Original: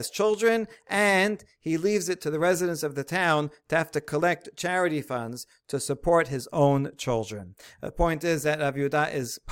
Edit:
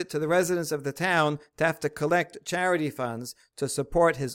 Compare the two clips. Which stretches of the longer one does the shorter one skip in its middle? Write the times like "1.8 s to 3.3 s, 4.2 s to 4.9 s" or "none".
none